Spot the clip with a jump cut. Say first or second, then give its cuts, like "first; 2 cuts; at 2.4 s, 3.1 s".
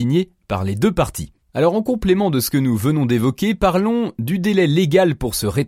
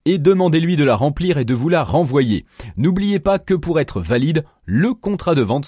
first; 1 cut; at 1.4 s